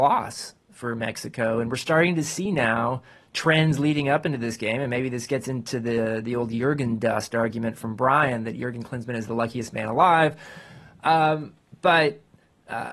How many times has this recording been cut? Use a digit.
0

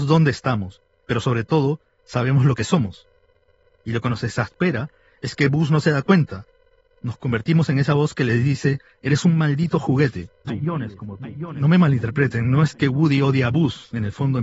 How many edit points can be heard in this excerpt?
1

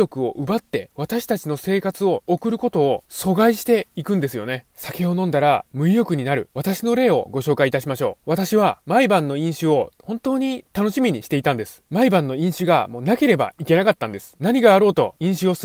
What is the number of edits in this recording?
0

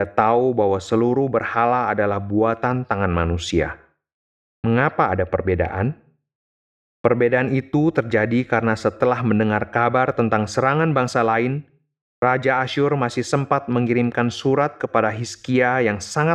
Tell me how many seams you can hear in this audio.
1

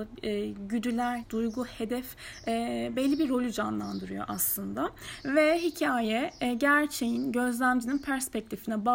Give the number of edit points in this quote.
2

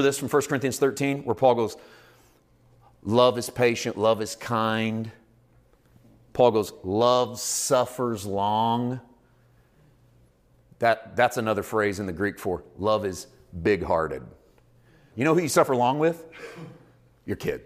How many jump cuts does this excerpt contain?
1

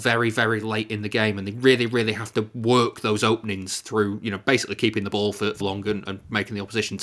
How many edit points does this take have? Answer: 1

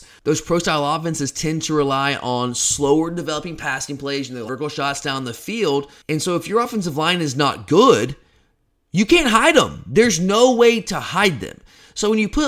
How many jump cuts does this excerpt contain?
1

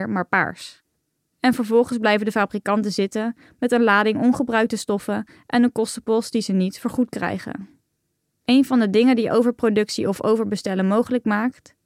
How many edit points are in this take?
1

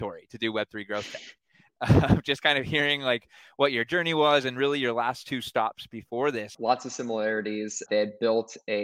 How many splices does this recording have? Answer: 2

